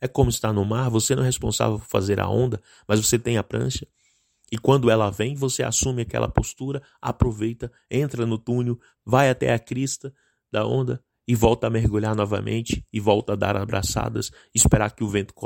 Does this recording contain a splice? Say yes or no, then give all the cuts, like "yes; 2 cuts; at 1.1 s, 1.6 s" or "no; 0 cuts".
yes; 1 cut; at 8.9 s